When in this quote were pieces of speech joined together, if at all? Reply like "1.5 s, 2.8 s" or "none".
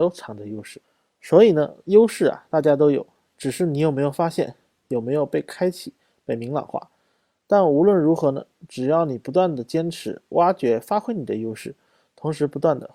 none